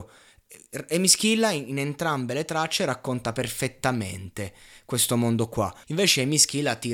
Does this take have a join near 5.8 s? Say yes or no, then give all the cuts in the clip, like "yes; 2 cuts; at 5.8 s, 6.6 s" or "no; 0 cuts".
yes; 1 cut; at 5.8 s